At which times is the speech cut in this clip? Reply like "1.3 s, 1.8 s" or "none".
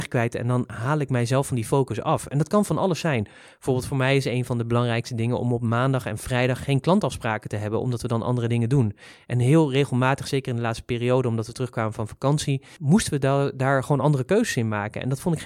12.8 s